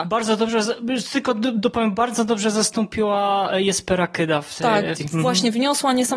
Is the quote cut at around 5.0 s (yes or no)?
yes